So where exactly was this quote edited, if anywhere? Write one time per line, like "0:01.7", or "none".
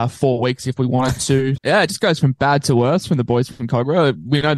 0:01.6